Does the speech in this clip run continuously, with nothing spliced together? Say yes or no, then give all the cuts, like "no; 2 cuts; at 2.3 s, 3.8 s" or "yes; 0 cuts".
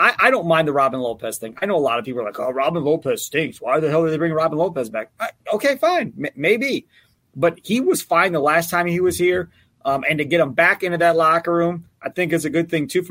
yes; 0 cuts